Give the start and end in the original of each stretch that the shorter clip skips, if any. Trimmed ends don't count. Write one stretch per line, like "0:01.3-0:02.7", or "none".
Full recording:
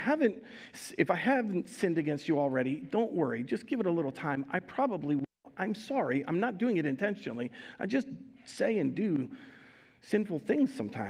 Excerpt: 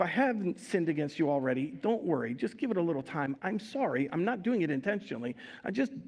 0:04.5-0:05.5